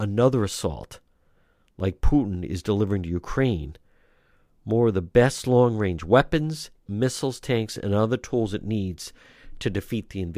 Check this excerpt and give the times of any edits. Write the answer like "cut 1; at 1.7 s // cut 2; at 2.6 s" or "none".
cut 1; at 6.9 s